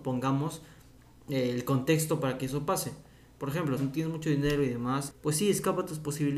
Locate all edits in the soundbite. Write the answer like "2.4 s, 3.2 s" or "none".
3.8 s, 5.1 s